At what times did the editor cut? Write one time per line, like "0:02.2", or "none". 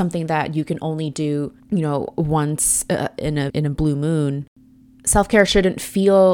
0:01.6
0:03.5